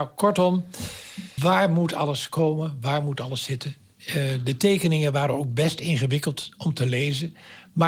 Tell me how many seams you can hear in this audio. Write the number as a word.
one